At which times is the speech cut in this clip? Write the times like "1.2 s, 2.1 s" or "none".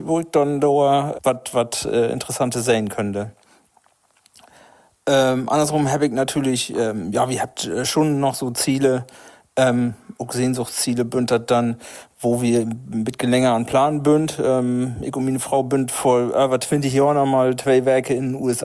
1.1 s